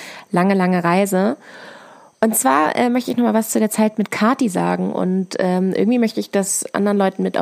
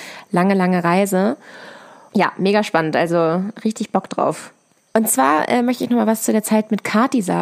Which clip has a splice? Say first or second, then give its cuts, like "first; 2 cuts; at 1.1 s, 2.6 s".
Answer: second; 2 cuts; at 2.1 s, 4.9 s